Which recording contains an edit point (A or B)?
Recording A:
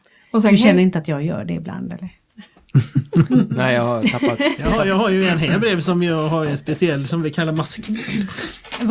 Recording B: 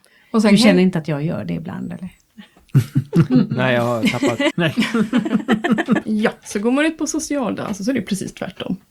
B